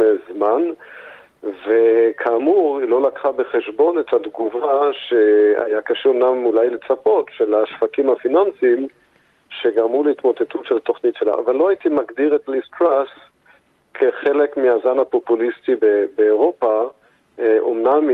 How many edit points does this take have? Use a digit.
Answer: 1